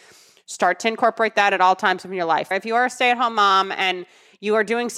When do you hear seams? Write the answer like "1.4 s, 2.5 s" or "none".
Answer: 2.5 s